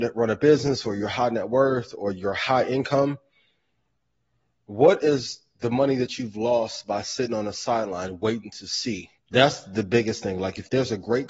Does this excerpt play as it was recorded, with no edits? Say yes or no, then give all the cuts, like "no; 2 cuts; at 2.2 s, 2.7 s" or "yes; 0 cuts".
no; 1 cut; at 9.2 s